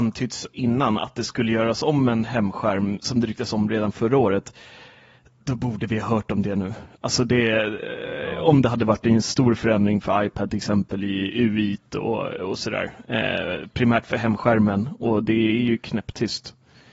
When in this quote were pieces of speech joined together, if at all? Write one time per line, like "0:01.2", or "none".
none